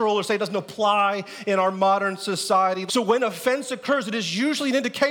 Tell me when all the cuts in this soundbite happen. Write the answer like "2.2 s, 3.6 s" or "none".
2.9 s

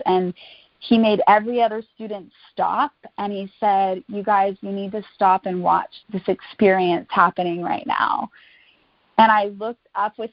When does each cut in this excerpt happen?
6.0 s

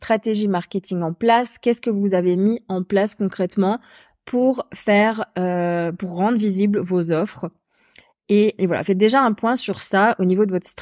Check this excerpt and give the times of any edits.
8.6 s

